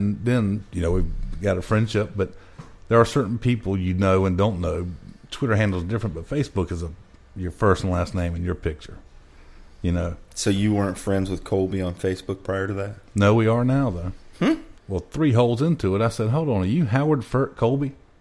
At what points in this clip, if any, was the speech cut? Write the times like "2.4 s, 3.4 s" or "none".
14.8 s